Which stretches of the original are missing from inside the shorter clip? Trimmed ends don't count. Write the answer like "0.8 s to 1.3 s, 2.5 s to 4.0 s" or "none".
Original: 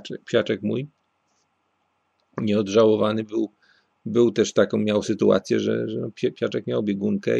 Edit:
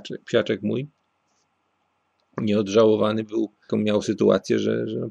3.7 s to 4.7 s